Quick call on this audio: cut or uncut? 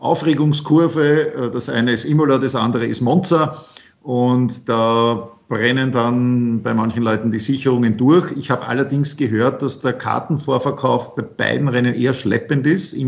uncut